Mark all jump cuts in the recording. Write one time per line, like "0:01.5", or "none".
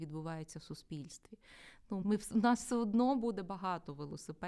0:02.0